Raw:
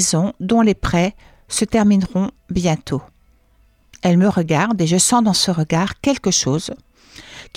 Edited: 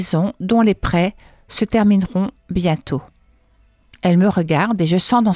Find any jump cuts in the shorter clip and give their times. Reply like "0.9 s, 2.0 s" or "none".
none

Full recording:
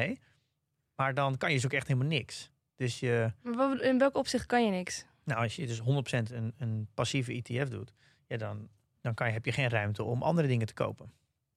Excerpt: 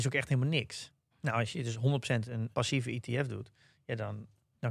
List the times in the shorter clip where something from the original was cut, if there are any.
1.1 s, 2.5 s

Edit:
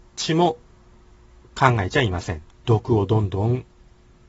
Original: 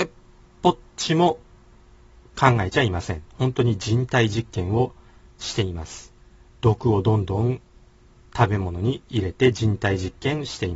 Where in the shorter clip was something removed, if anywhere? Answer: 2.5 s

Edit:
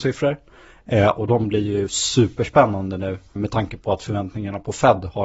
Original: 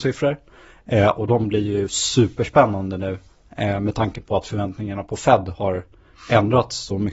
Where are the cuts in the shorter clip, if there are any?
3.4 s

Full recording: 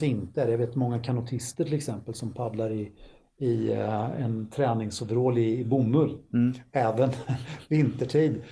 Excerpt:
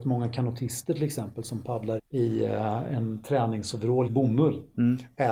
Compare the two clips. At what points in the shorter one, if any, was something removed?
2.0 s, 4.1 s

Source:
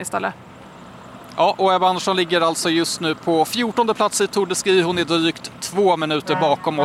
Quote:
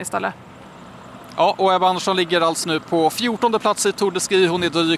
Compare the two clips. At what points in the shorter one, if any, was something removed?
2.6 s

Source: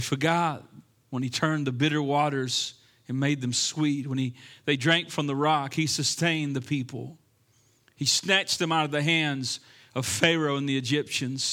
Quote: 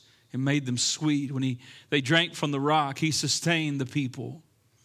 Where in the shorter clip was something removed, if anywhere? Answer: none

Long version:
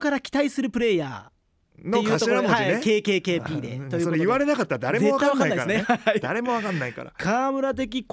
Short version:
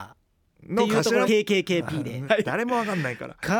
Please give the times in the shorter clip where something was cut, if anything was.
1.3 s, 2.3 s

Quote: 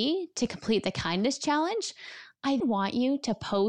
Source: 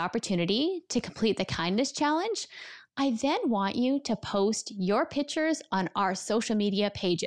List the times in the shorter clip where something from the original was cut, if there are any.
2.6 s

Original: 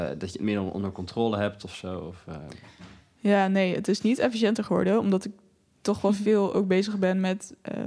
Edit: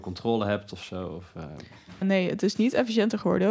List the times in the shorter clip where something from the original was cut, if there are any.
2.0 s

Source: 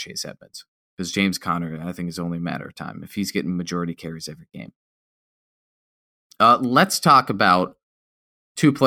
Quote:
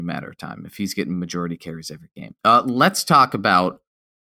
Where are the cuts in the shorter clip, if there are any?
2.4 s

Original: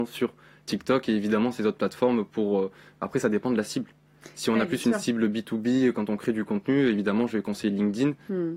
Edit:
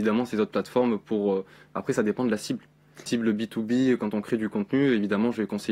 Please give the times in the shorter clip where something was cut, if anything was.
3.1 s

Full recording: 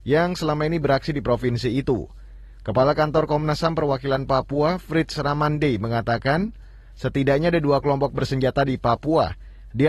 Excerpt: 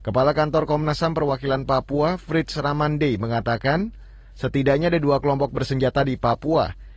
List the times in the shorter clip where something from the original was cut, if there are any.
none

